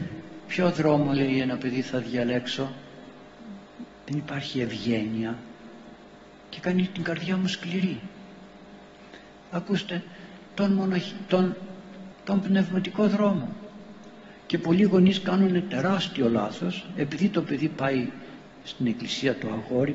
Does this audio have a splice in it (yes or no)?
yes